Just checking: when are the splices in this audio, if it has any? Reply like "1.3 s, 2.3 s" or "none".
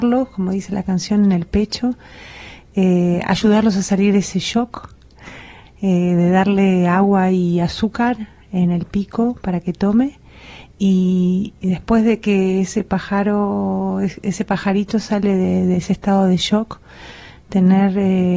5.7 s